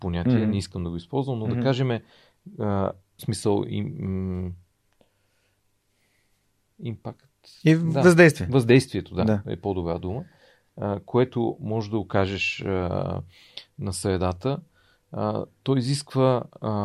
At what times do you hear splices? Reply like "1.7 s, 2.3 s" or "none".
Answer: 3.2 s